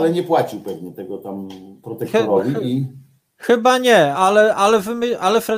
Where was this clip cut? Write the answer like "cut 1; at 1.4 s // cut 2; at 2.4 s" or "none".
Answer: cut 1; at 4.1 s